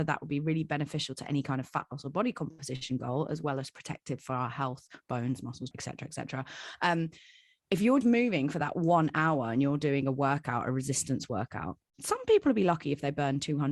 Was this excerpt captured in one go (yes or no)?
no